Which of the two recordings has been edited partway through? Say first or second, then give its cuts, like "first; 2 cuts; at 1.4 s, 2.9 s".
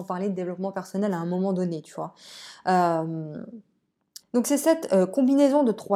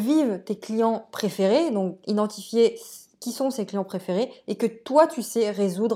first; 1 cut; at 4.2 s